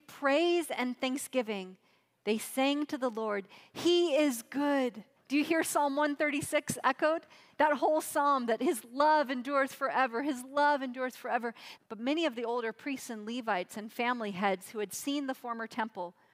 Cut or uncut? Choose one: cut